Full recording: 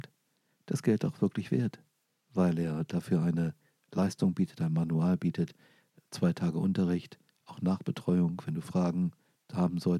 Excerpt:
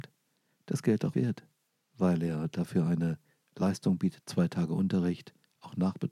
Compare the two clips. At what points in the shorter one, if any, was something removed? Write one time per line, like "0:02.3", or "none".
0:01.1
0:04.2